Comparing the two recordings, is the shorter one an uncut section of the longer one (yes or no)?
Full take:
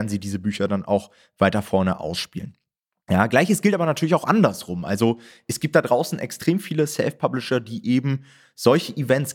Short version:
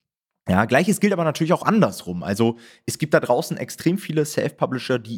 yes